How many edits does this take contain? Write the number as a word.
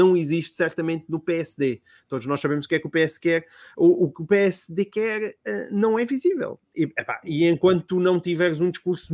zero